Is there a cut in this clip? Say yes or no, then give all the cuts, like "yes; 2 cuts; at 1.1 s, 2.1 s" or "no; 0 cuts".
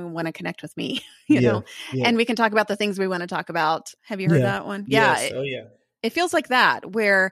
yes; 1 cut; at 4.0 s